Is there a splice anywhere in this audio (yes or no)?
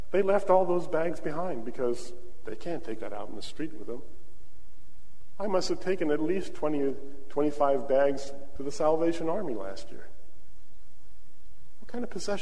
yes